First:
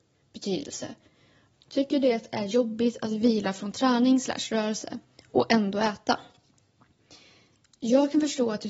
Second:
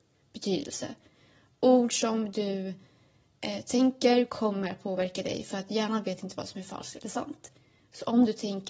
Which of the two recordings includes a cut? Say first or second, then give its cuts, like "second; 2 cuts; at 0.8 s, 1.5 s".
first; 1 cut; at 1.5 s